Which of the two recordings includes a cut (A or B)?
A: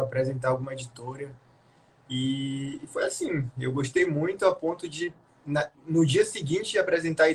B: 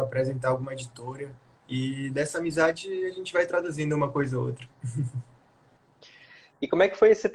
B